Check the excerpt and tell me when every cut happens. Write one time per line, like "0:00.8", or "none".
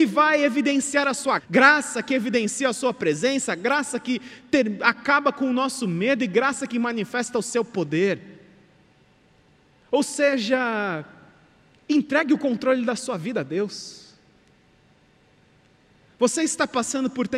0:01.4